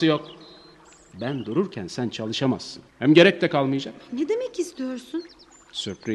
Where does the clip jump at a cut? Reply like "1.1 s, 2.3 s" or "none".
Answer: 2.9 s